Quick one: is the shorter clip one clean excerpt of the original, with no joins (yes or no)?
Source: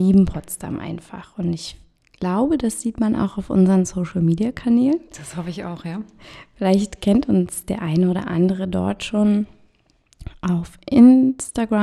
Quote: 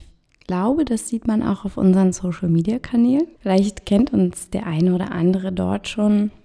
no